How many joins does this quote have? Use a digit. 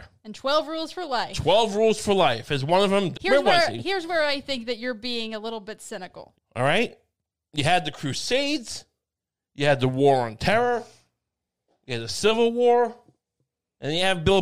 2